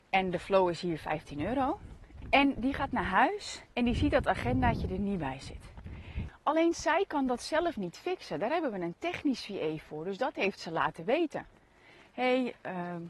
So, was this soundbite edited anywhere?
yes; 3 cuts; at 2.2 s, 3.7 s, 6.3 s

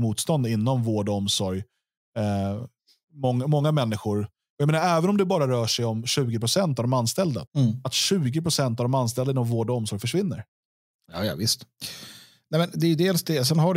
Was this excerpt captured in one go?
no; 1 cut; at 7.5 s

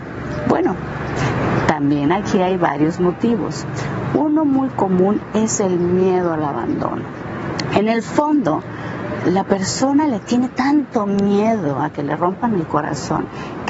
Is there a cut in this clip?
no; 0 cuts

